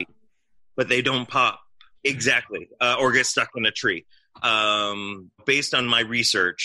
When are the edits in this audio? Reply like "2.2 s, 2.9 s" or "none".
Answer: 2.0 s, 5.4 s